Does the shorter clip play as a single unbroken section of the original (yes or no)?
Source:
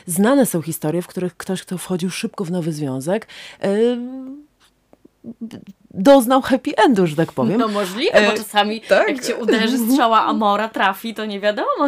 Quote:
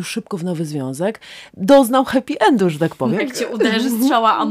no